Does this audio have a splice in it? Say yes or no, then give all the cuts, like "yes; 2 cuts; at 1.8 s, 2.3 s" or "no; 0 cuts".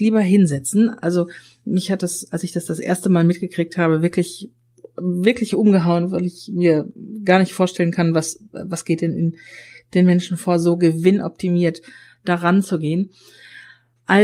no; 0 cuts